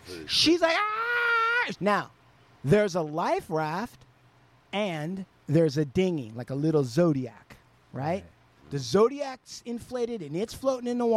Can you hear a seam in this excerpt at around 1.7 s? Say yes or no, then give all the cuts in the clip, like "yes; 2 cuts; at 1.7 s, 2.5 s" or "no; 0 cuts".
yes; 1 cut; at 1.7 s